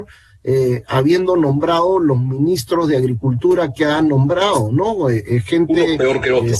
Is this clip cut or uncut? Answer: uncut